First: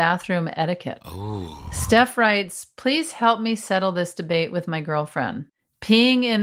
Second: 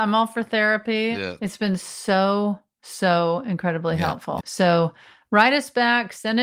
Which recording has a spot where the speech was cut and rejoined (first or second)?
second